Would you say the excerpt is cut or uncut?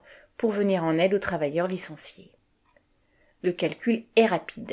uncut